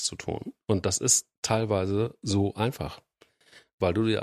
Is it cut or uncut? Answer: uncut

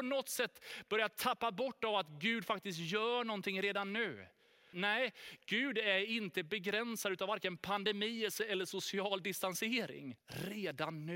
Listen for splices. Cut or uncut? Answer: cut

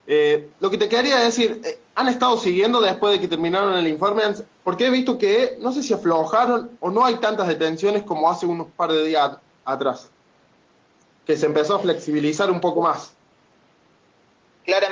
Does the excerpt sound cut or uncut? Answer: cut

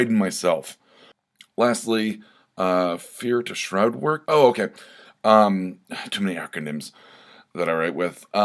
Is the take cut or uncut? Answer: cut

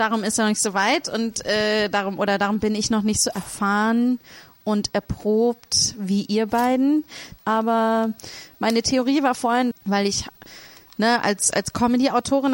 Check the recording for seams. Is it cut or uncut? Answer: cut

